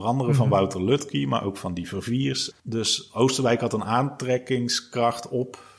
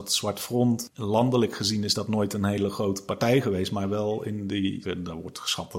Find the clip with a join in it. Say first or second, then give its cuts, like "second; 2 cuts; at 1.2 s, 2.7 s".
second; 1 cut; at 4.8 s